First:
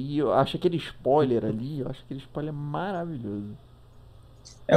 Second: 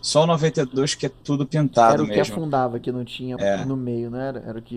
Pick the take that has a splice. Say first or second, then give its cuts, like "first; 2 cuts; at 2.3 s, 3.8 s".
second; 2 cuts; at 1.2 s, 3.4 s